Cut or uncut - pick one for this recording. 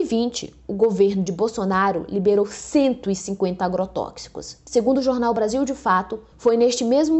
uncut